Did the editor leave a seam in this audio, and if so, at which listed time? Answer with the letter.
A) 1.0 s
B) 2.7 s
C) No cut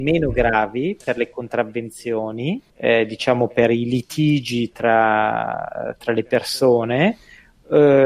B